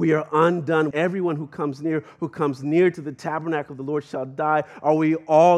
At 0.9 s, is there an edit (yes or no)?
yes